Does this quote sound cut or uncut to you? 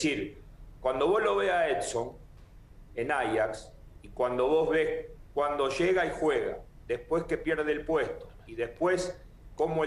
uncut